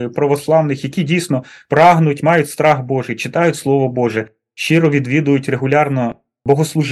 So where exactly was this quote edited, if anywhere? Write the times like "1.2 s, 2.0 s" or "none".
none